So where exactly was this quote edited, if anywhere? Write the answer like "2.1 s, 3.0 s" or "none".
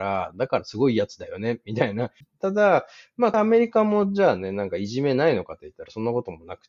2.2 s, 3.3 s